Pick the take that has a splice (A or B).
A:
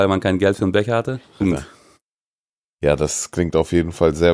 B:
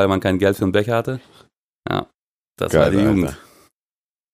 A